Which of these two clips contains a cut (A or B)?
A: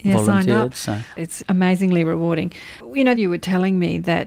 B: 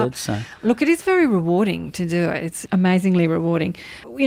A